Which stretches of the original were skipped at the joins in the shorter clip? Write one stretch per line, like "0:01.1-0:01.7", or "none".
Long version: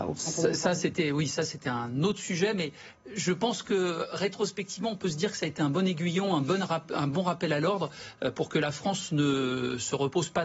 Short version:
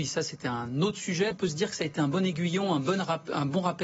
0:02.5-0:04.9